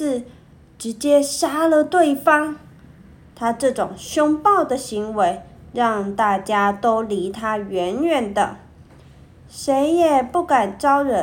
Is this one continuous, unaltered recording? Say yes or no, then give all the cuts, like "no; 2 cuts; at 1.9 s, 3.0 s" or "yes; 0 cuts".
yes; 0 cuts